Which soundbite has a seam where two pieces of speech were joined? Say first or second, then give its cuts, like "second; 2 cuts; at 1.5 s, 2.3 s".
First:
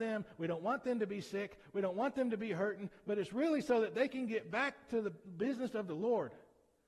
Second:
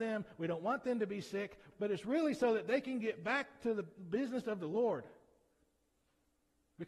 second; 1 cut; at 1.7 s